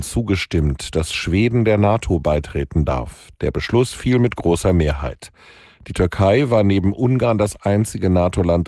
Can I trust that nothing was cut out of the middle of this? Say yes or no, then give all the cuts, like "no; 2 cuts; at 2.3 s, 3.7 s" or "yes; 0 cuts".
yes; 0 cuts